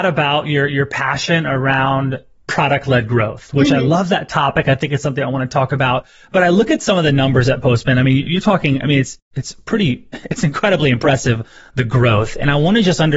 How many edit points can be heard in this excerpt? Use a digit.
0